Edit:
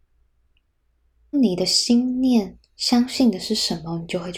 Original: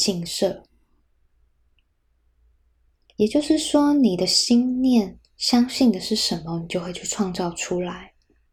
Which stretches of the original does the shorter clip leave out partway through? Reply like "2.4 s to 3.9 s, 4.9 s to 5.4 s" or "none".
2.5 s to 3.9 s